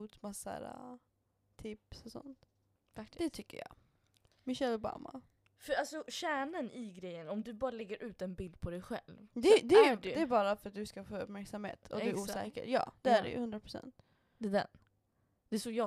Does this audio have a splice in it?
yes; 1 cut; at 2.8 s

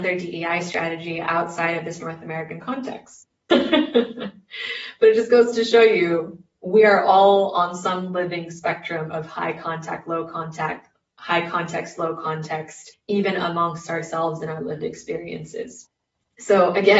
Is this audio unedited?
no; 1 cut; at 3.5 s

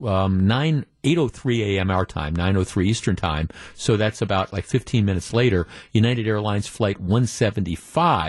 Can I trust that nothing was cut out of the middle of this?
yes; 0 cuts

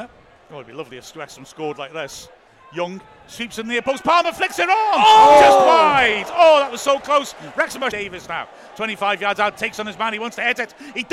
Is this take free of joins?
no; 1 cut; at 7.9 s

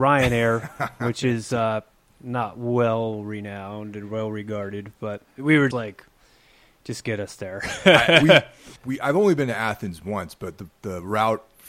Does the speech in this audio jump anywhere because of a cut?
yes; 2 cuts; at 5.7 s, 8.8 s

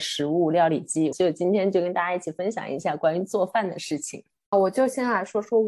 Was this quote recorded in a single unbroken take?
no; 2 cuts; at 1.1 s, 4.5 s

